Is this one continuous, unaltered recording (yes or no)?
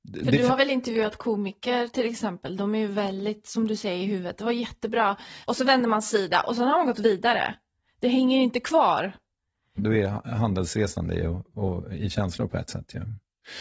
no